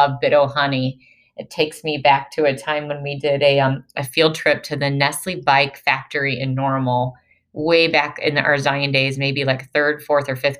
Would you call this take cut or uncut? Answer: uncut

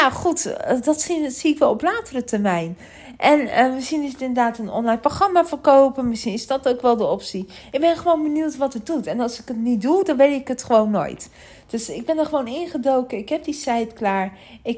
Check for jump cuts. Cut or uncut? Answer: uncut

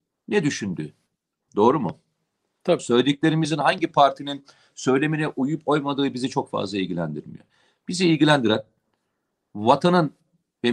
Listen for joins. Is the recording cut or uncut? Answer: cut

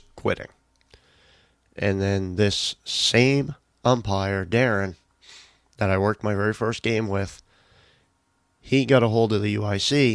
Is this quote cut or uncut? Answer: uncut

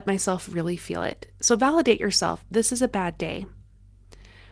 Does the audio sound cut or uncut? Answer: uncut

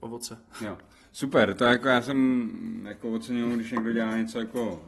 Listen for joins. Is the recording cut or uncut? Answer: uncut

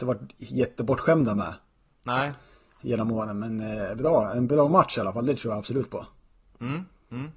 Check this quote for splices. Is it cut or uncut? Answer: uncut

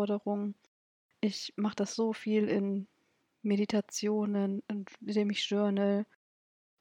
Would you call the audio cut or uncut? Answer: uncut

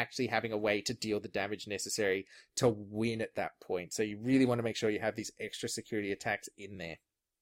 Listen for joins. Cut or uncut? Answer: uncut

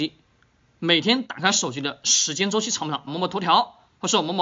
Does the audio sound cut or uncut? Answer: cut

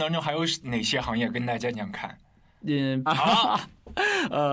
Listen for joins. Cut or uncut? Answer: cut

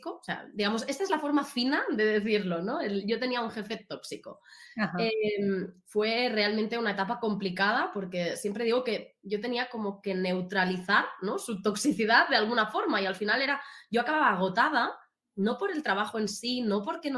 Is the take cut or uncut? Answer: uncut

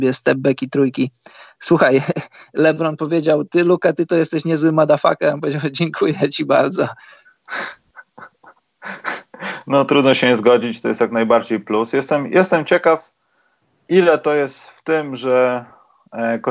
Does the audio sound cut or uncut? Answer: uncut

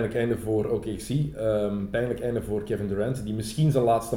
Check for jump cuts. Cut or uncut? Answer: uncut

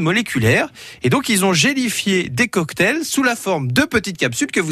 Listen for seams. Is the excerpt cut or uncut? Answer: uncut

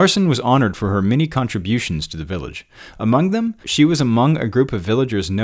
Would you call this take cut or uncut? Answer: cut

